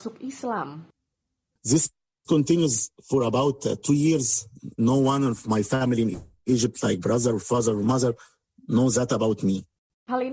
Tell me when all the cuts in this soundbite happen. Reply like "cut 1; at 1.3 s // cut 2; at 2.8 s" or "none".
none